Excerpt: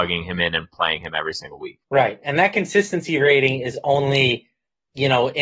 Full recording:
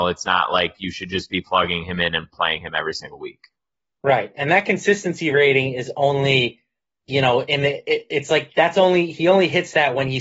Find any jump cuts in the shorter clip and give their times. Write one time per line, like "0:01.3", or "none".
0:01.8

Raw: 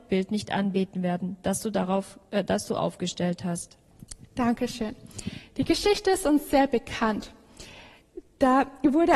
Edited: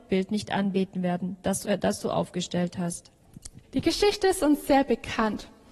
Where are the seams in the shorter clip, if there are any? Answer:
0:01.6
0:03.6

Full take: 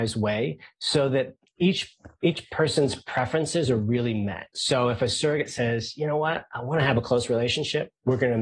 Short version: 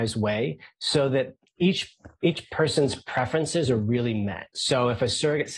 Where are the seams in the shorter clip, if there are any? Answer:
none

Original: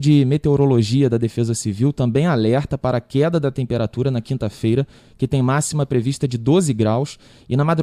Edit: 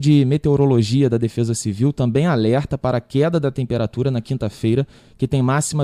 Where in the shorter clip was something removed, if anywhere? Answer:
none

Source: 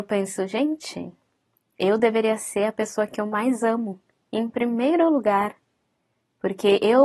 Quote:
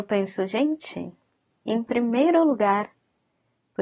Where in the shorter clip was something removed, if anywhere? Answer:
0:01.5

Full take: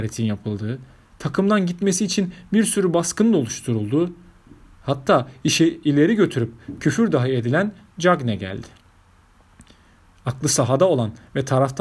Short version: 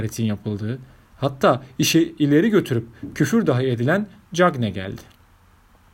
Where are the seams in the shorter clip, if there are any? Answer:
0:01.1

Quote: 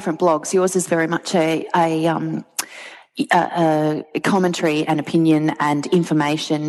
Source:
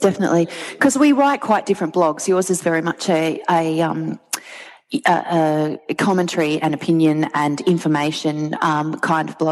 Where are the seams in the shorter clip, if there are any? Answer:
none

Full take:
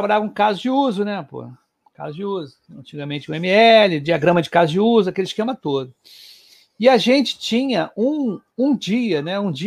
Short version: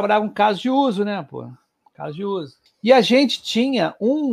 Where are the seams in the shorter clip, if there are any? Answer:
0:02.7

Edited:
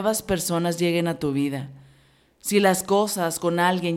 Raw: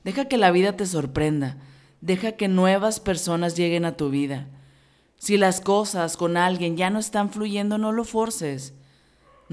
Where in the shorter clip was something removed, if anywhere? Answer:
none

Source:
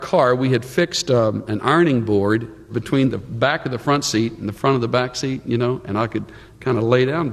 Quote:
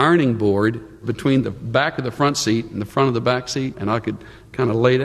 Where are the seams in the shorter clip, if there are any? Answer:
0:03.7

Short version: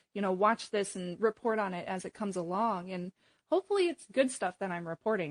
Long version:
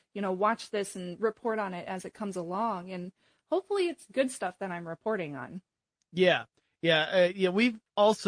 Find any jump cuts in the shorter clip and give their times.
none

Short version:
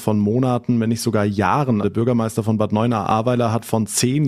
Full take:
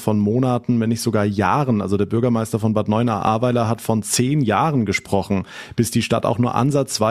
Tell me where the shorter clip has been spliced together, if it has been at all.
0:01.8

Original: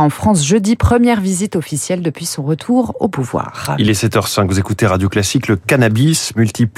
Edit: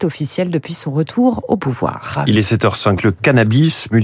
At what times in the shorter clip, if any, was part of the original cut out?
0:03.0

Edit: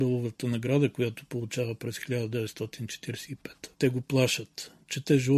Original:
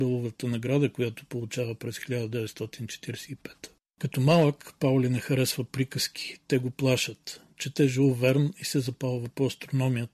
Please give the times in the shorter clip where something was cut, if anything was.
0:03.7

